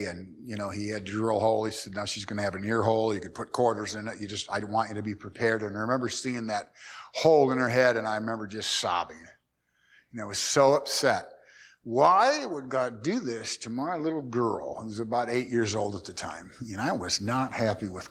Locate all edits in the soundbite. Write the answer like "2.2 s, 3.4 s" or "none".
none